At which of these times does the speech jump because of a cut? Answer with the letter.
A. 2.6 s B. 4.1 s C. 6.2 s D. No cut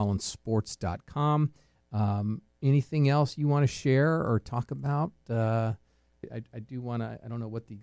C